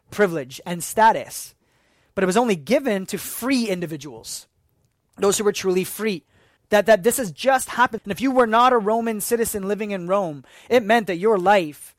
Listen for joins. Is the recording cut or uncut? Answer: cut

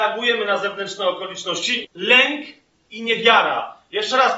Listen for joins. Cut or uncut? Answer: cut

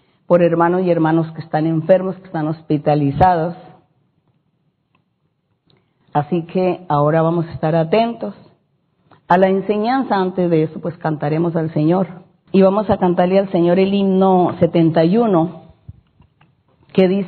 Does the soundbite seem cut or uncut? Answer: cut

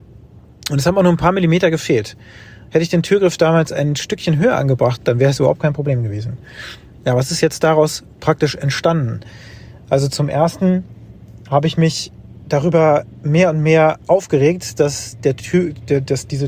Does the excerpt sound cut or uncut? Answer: cut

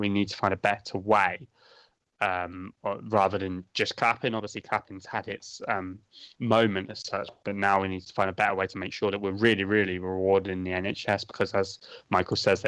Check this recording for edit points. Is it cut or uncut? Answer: uncut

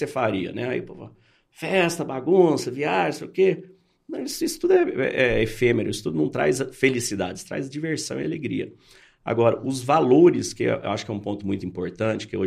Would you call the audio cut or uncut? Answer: uncut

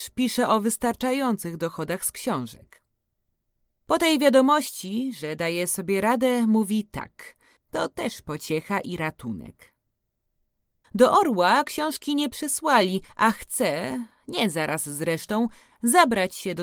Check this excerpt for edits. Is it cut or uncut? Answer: cut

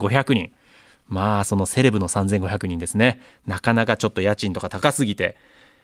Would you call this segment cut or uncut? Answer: uncut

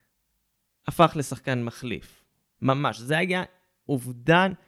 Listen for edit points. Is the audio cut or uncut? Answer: cut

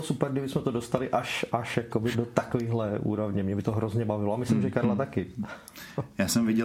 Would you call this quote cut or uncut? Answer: cut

